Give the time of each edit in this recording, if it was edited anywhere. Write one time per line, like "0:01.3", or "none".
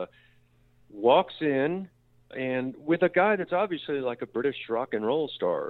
none